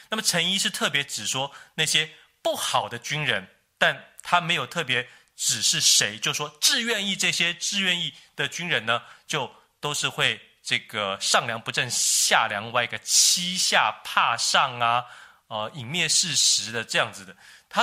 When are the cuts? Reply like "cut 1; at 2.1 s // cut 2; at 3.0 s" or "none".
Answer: none

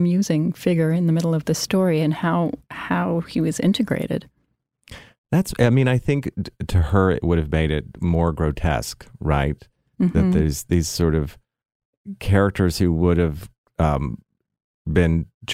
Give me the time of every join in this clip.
none

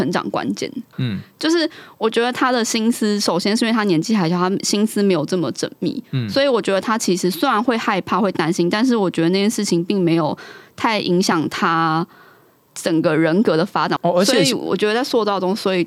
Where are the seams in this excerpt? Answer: cut 1; at 0.9 s // cut 2; at 14.0 s

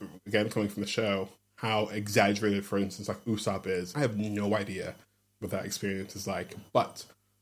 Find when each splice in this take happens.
cut 1; at 3.9 s

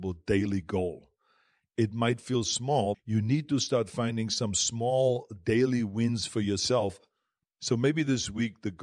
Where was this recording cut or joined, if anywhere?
cut 1; at 2.9 s

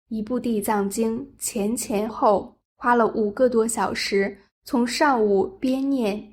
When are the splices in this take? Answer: cut 1; at 2.1 s

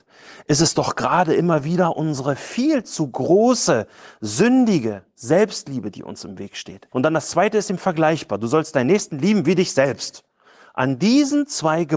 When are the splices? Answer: cut 1; at 6.9 s

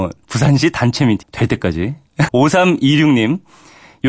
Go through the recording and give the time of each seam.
cut 1; at 1.2 s // cut 2; at 2.3 s

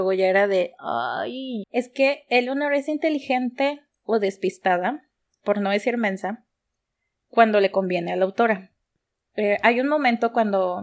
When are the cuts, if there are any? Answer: cut 1; at 1.6 s

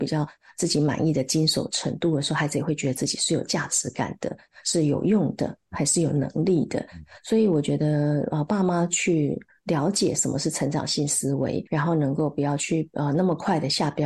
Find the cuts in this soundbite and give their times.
cut 1; at 11.7 s

